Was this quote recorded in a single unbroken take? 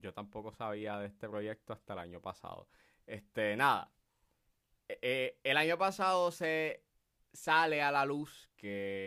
yes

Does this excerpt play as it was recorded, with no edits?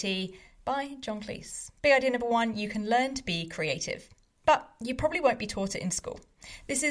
no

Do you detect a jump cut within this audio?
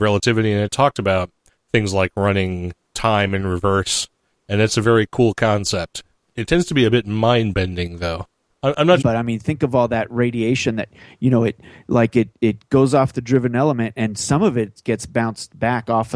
yes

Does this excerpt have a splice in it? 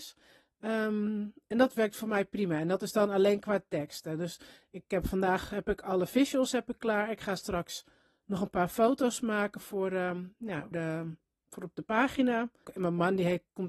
yes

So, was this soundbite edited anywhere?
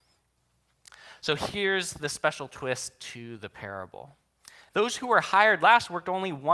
yes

